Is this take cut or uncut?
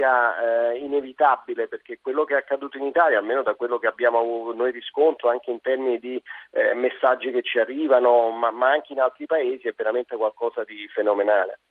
uncut